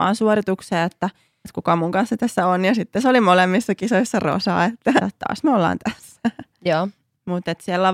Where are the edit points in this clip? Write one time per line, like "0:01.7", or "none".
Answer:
0:01.4
0:05.0